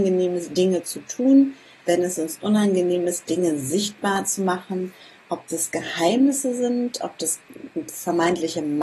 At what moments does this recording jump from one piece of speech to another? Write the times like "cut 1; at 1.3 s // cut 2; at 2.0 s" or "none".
cut 1; at 1.9 s